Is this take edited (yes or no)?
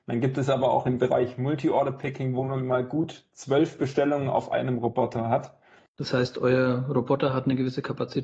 yes